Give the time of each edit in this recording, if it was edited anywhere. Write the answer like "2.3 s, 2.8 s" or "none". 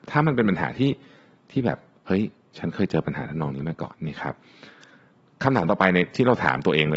3.9 s